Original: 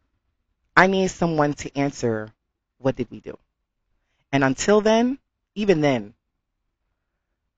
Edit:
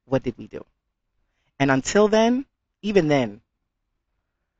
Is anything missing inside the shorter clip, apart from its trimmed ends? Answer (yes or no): no